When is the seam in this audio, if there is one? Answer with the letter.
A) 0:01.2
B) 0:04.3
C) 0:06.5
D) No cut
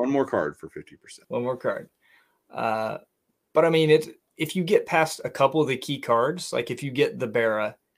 A